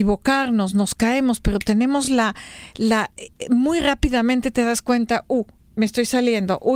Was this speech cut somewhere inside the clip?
no; 0 cuts

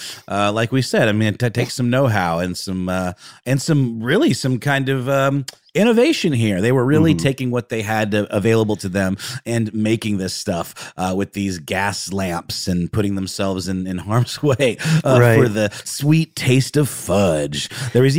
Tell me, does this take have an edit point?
yes; 1 cut; at 15.8 s

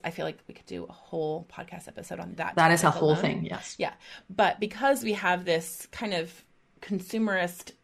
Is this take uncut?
yes; 0 cuts

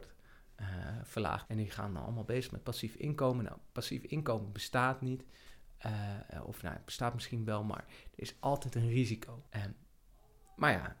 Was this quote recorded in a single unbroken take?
no; 2 cuts; at 1.5 s, 9.5 s

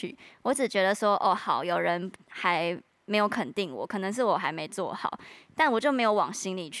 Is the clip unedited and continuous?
yes; 0 cuts

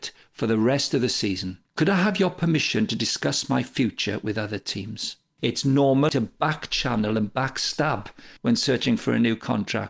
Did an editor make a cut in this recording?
yes; 3 cuts; at 1.7 s, 5.4 s, 8.4 s

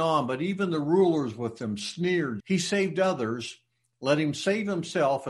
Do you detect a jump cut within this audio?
yes; 1 cut; at 2.4 s

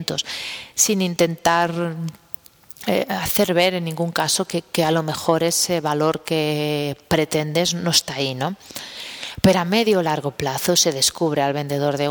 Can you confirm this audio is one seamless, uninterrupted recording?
yes; 0 cuts

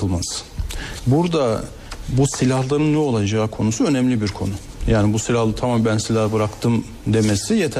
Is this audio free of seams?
no; 1 cut; at 1.0 s

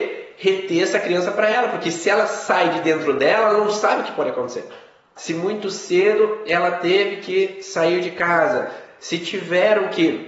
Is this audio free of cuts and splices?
no; 2 cuts; at 5.2 s, 9.0 s

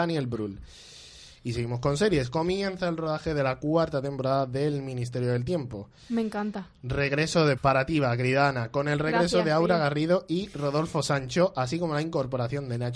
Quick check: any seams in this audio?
yes; 1 cut; at 7.6 s

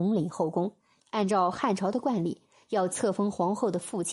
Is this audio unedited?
no; 1 cut; at 1.0 s

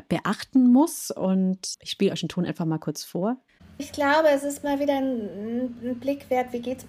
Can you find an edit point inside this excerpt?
no; 0 cuts

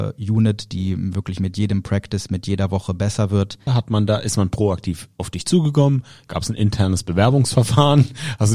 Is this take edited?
yes; 1 cut; at 3.7 s

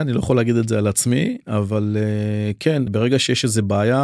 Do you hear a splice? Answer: yes; 1 cut; at 2.9 s

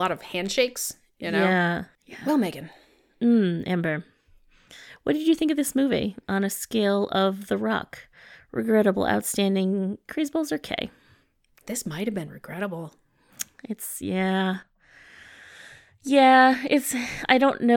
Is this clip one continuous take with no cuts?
yes; 0 cuts

